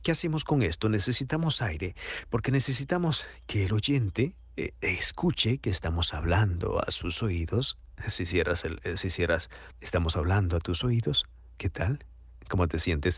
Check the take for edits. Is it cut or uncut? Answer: cut